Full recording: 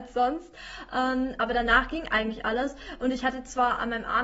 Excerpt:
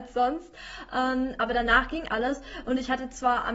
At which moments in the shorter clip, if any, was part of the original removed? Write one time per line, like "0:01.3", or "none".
0:02.1